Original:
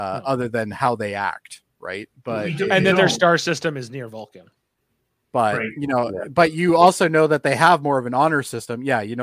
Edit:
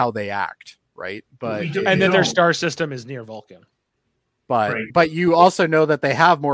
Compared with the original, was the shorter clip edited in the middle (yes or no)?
yes